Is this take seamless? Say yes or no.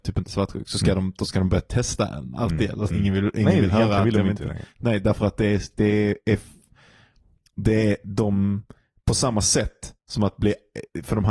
no